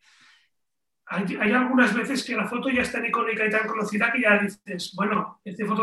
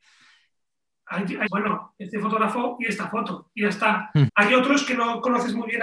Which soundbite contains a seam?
second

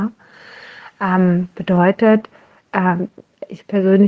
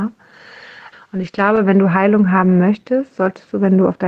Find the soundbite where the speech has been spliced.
second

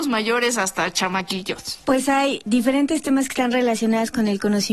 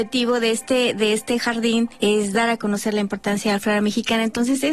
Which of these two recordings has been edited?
first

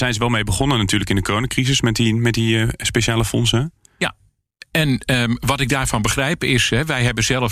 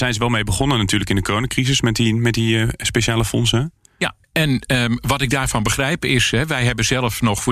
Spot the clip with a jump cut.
second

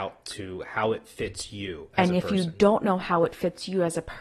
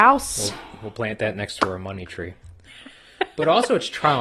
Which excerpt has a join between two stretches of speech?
second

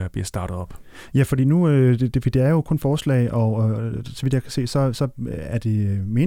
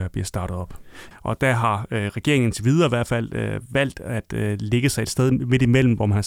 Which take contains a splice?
second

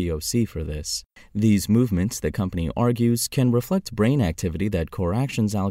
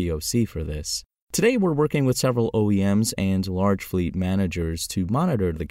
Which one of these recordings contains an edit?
first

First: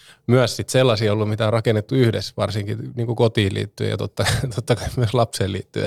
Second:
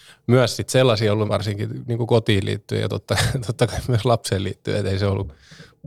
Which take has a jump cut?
second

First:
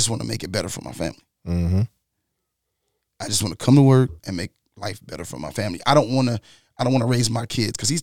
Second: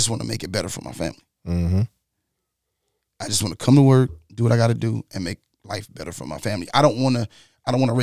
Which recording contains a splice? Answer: first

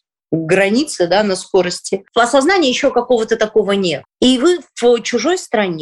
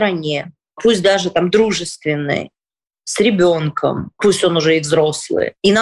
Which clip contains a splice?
first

